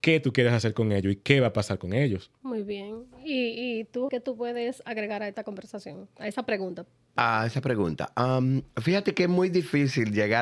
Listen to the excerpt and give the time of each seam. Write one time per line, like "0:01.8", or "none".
0:02.4
0:04.1